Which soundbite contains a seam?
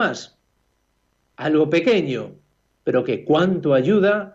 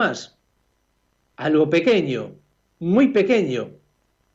first; 1 cut; at 2.7 s

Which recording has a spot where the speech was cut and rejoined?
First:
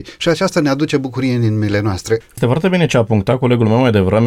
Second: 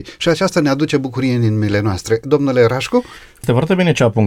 first; 1 cut; at 2.2 s

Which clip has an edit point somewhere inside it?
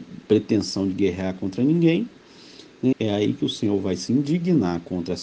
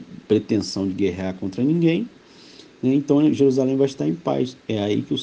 first; 1 cut; at 2.9 s

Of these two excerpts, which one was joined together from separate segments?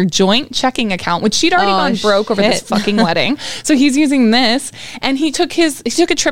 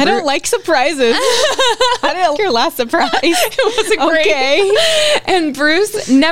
second; 1 cut; at 2.3 s

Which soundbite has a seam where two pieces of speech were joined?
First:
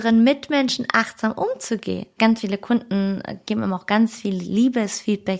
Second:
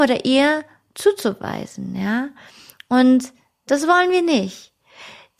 first; 1 cut; at 2.2 s

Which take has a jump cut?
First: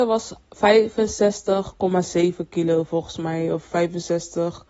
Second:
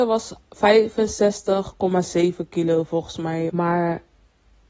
second; 1 cut; at 3.5 s

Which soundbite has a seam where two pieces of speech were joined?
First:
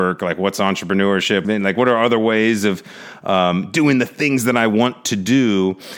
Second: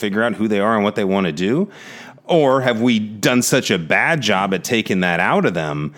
first; 1 cut; at 1.4 s

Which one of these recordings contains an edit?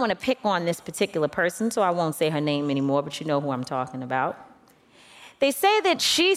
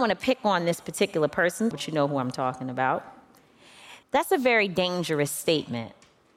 second; 2 cuts; at 1.7 s, 4.0 s

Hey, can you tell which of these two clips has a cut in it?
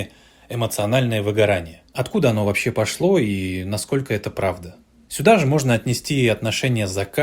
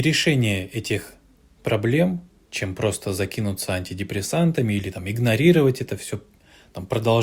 second; 1 cut; at 2.5 s

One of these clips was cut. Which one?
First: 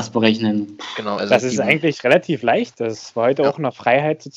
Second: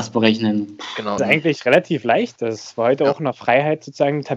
second; 1 cut; at 1.2 s

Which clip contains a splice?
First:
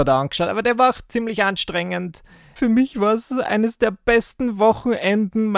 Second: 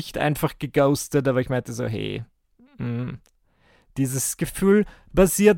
first; 1 cut; at 2.6 s

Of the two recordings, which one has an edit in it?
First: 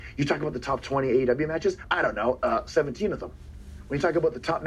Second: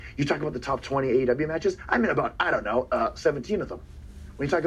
first; 1 cut; at 1.8 s

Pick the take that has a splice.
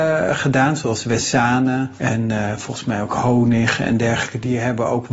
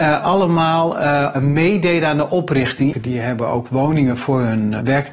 second; 1 cut; at 2.9 s

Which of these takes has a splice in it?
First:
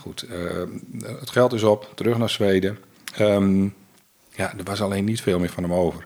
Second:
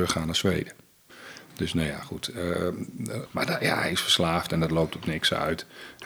second; 1 cut; at 3.2 s

